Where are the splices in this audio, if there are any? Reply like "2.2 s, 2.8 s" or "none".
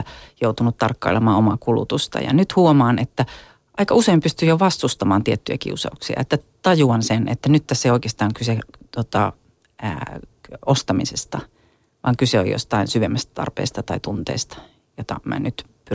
none